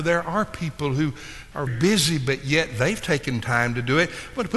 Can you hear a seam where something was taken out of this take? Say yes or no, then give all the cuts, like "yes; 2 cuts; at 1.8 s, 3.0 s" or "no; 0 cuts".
yes; 1 cut; at 1.7 s